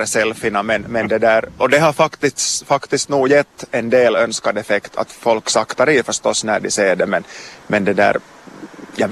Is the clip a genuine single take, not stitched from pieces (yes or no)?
no